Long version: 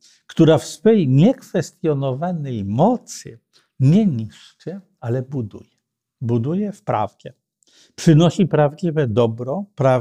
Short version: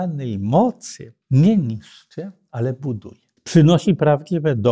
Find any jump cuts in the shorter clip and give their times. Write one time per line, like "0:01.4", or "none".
0:01.2
0:03.4